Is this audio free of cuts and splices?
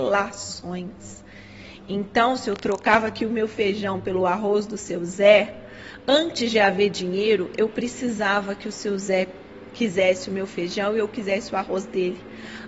yes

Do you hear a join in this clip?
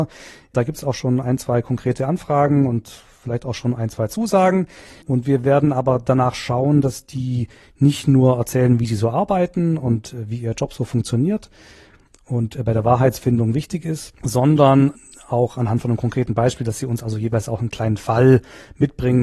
yes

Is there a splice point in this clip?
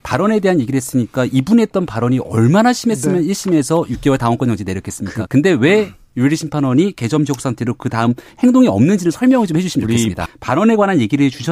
yes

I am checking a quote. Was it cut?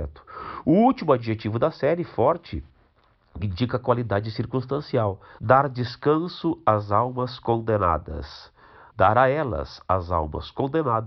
yes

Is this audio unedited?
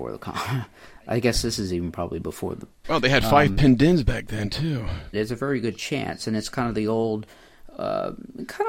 no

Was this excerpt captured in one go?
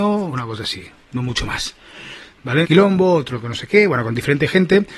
no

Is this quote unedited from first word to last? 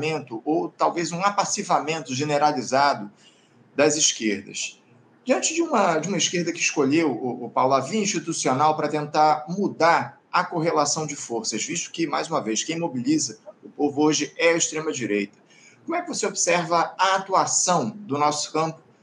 yes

